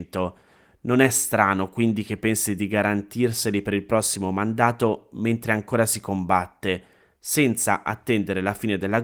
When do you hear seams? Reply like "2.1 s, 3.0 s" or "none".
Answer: none